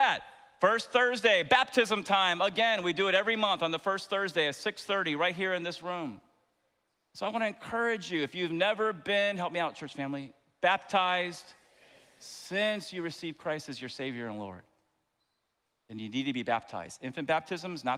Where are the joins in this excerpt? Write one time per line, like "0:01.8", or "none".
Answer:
none

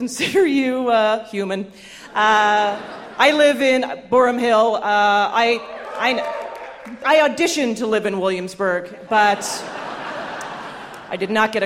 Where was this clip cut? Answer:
none

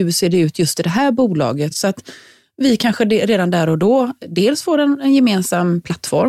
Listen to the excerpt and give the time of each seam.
none

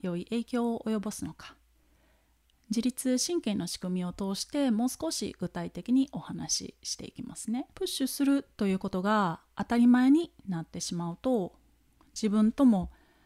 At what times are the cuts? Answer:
0:07.7

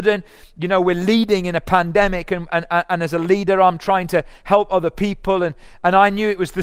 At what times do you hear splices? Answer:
none

